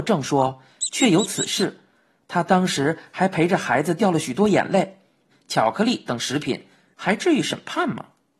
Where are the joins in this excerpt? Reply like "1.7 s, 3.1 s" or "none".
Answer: 5.3 s, 6.9 s